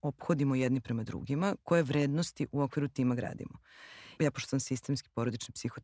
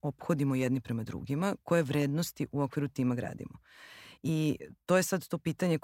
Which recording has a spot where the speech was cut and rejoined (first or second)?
first